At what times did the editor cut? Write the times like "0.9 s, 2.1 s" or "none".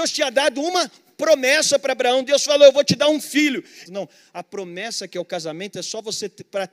3.9 s